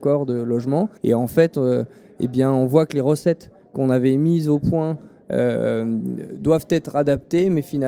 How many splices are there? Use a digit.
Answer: 1